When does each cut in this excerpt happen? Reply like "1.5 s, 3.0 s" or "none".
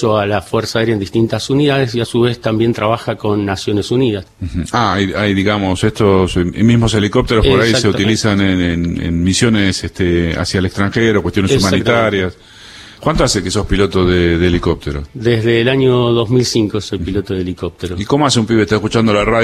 4.2 s, 13.0 s

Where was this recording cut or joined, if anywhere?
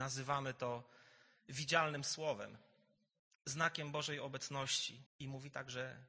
5.1 s

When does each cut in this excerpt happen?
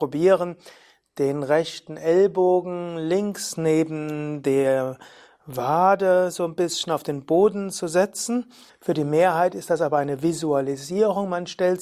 8.7 s

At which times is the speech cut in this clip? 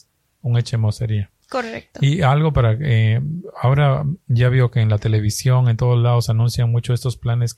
none

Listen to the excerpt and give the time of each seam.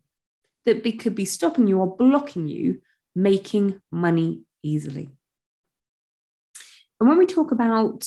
none

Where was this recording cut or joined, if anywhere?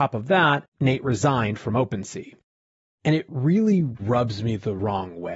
2.9 s

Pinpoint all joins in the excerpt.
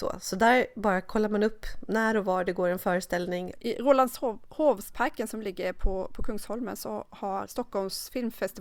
3.5 s, 7.5 s

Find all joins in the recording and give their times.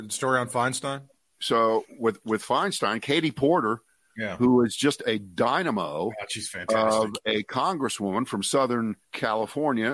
9.0 s

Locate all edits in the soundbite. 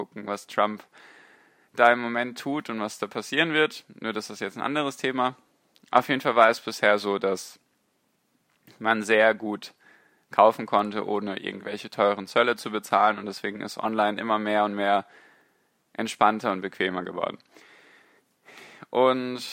none

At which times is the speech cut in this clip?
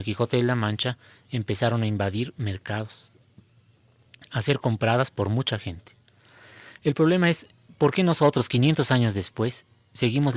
none

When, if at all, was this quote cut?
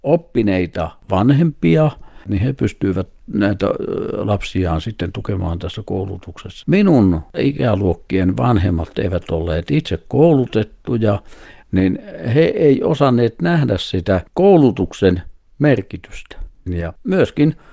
6.6 s, 14.3 s, 16.7 s

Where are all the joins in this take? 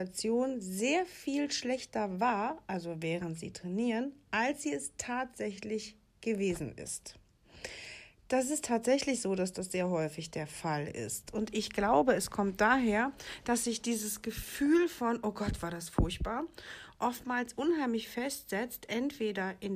none

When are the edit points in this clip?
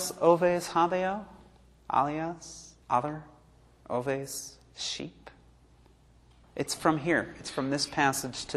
2.8 s

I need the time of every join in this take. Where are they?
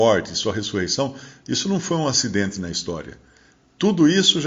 none

